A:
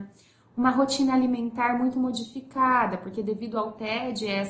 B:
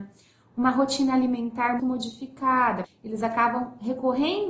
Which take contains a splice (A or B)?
B